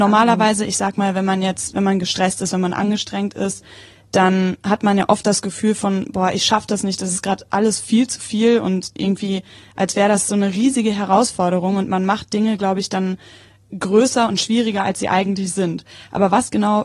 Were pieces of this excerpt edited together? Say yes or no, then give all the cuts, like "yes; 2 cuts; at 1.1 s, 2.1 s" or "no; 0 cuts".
no; 0 cuts